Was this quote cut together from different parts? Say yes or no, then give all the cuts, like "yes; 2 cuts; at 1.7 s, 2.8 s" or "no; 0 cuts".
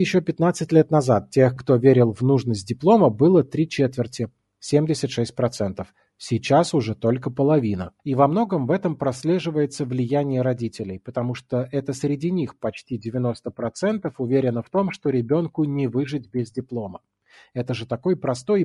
no; 0 cuts